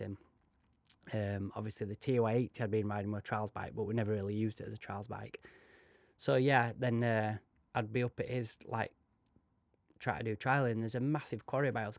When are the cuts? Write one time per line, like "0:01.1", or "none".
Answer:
none